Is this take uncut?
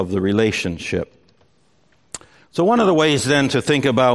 yes; 0 cuts

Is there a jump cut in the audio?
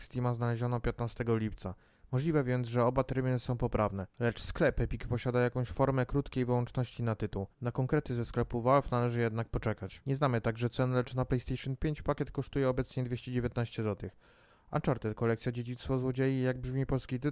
no; 0 cuts

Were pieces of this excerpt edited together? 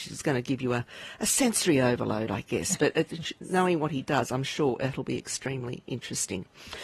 no; 0 cuts

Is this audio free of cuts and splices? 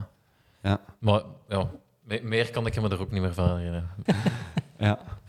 no; 1 cut; at 4.1 s

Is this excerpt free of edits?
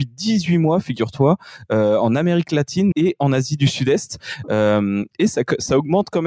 no; 1 cut; at 2.9 s

